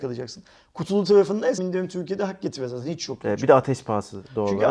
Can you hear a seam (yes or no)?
yes